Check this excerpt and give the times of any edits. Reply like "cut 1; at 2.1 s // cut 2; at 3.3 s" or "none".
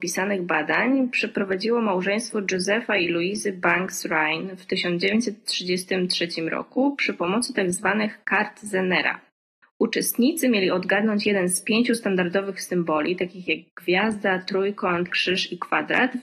cut 1; at 15.1 s